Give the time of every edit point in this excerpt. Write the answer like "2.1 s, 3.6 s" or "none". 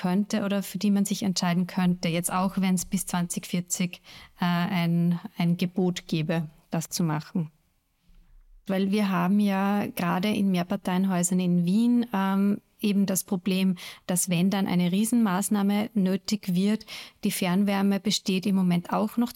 8.7 s